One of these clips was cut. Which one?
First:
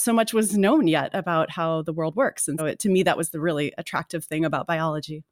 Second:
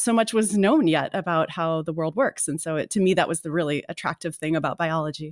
first; 1 cut; at 2.6 s

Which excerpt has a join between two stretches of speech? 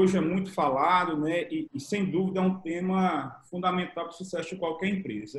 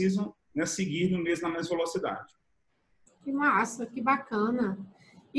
first; 1 cut; at 1.7 s

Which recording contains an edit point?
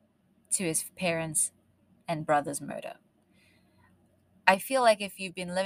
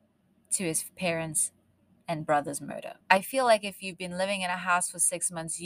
second; 1 cut; at 3.0 s

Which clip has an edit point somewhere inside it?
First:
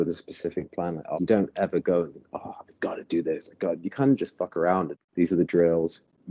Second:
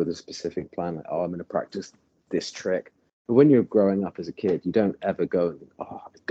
first; 2 cuts; at 1.1 s, 4.9 s

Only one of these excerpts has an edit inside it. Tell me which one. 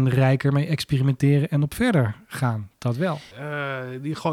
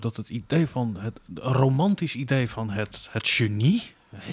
first; 1 cut; at 3.3 s

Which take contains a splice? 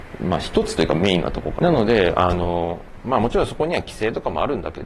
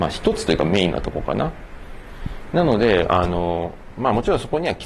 first; 1 cut; at 1.6 s

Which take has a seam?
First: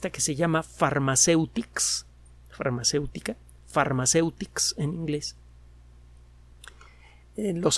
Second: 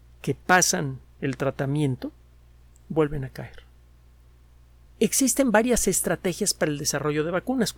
second; 1 cut; at 4.9 s

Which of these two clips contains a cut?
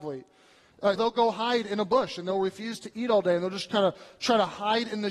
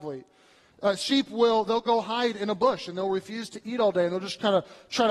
first; 1 cut; at 1.0 s

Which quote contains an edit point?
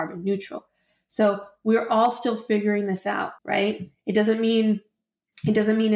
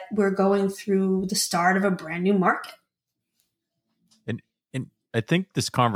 first; 1 cut; at 3.4 s

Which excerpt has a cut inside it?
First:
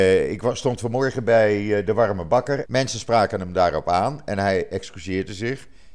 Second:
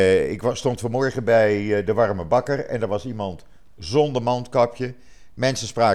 first; 1 cut; at 2.6 s

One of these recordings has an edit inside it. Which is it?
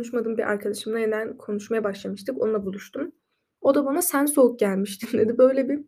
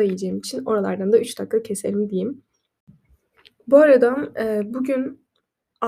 first; 1 cut; at 3.6 s

